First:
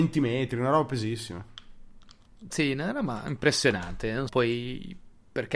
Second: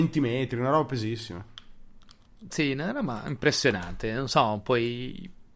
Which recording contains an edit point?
first; 1 cut; at 4.3 s

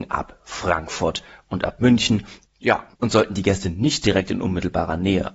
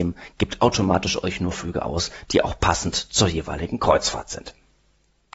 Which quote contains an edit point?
first; 1 cut; at 2.5 s

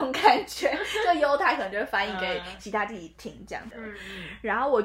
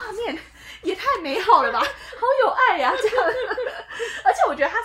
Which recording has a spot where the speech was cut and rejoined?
first; 1 cut; at 3.7 s

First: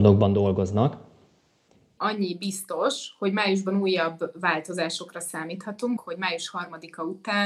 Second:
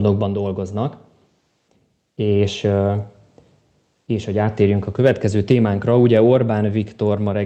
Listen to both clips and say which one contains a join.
first; 2 cuts; at 2.0 s, 6.0 s

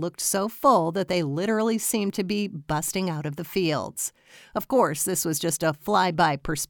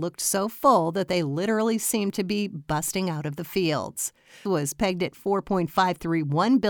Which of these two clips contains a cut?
second; 1 cut; at 4.5 s

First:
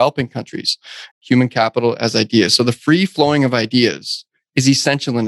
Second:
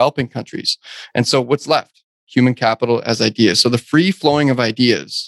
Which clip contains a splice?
first; 1 cut; at 1.1 s

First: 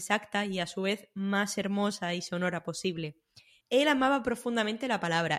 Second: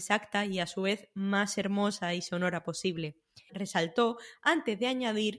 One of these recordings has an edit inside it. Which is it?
second; 1 cut; at 3.5 s

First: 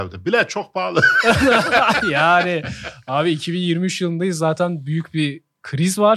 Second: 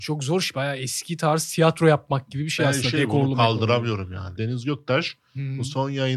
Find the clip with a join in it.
second; 1 cut; at 4.4 s

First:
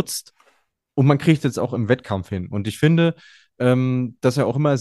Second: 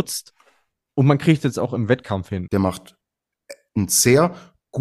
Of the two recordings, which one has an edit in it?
second; 1 cut; at 2.5 s

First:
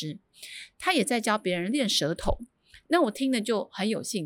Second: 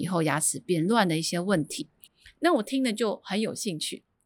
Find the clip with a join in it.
second; 1 cut; at 2.1 s

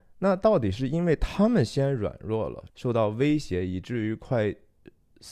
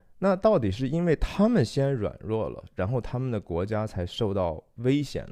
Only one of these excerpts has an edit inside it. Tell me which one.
first; 1 cut; at 2.7 s

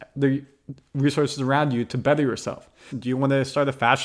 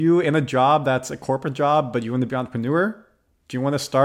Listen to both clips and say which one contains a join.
first; 1 cut; at 2.9 s

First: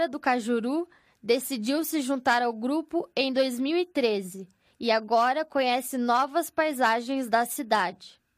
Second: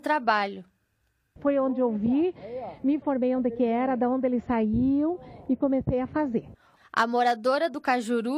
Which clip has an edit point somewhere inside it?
second; 2 cuts; at 1.4 s, 6.8 s

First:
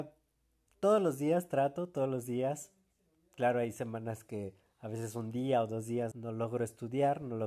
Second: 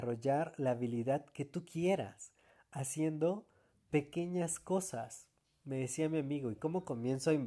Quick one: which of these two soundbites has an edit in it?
first; 1 cut; at 6.1 s

